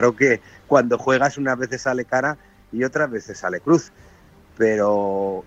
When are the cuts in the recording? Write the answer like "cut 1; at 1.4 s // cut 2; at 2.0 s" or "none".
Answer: none